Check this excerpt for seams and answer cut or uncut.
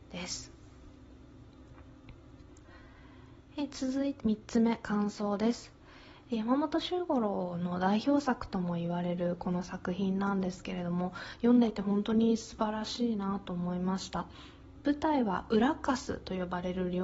cut